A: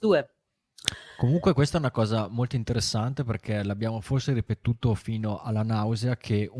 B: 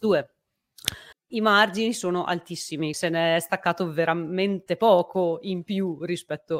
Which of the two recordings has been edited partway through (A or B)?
B